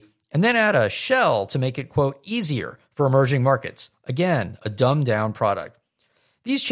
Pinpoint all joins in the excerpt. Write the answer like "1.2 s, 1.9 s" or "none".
none